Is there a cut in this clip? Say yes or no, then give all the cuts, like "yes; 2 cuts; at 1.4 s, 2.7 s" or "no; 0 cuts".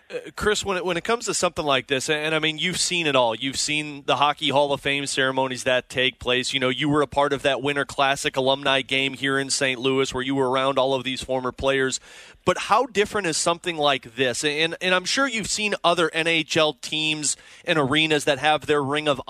no; 0 cuts